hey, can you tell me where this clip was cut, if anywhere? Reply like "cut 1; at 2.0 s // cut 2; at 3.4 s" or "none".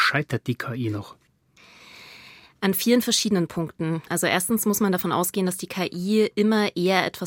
none